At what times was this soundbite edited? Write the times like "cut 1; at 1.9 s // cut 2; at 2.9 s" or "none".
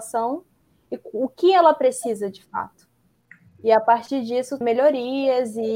cut 1; at 4.6 s